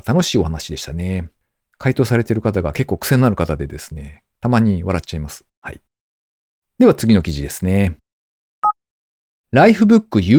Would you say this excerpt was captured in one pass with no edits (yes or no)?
no